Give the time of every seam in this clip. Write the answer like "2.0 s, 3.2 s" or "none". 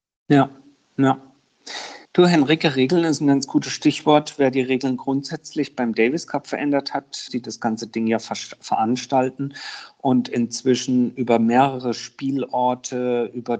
2.1 s, 7.3 s